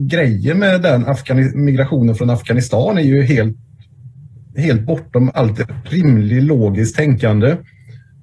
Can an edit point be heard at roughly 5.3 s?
yes; 1 cut; at 5.3 s

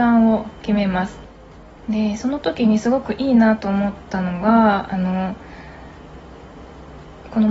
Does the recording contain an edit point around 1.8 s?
yes; 1 cut; at 1.8 s

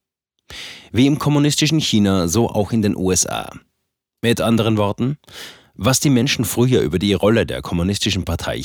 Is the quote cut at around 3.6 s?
no; 0 cuts

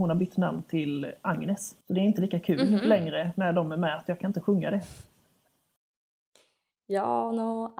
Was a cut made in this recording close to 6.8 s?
no; 1 cut; at 1.8 s

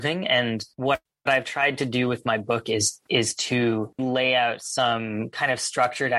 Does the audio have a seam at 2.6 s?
no; 1 cut; at 4.0 s

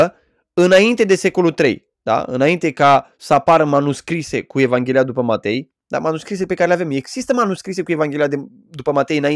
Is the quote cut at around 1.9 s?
yes; 1 cut; at 1.9 s

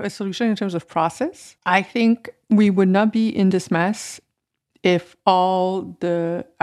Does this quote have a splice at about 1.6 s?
yes; 1 cut; at 1.6 s

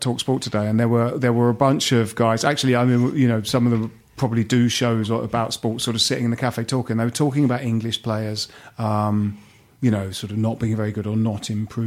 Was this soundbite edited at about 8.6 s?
no; 0 cuts

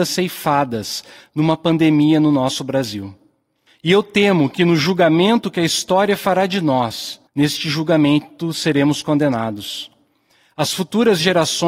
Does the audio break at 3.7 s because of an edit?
yes; 2 cuts; at 3.7 s, 7.3 s

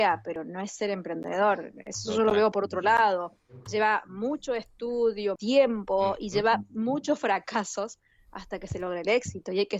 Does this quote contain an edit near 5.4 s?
yes; 1 cut; at 5.4 s

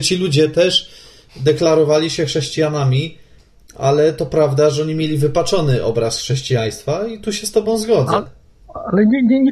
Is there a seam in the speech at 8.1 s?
no; 0 cuts

